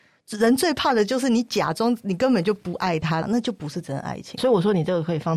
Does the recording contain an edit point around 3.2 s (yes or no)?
yes